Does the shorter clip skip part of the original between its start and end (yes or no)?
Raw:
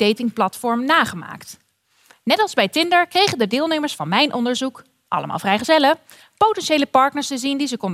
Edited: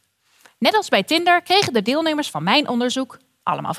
no